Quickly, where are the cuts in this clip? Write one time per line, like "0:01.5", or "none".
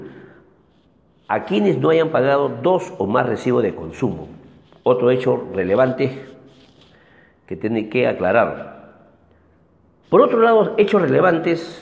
0:10.0

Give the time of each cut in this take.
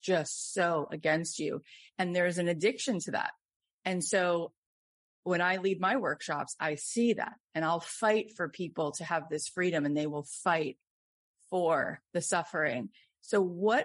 none

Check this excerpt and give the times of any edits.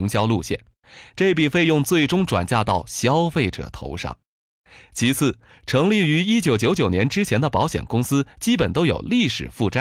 none

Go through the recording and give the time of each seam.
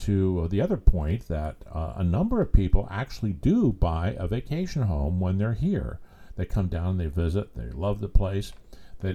none

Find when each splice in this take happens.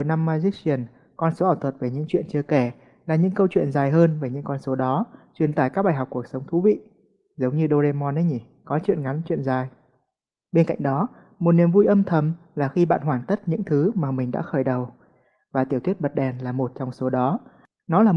0:10.4

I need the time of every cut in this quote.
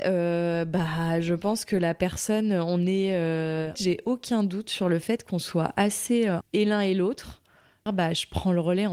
0:03.7
0:06.4
0:07.9

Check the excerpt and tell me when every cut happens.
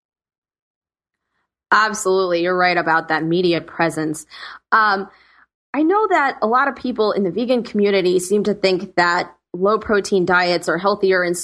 none

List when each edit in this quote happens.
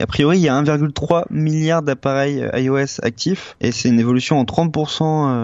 0:03.5

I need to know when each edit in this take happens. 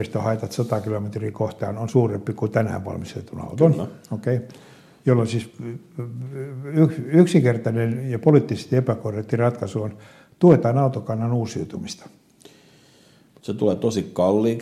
none

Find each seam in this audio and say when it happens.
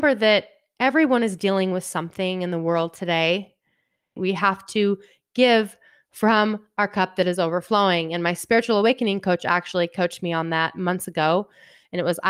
0:04.2

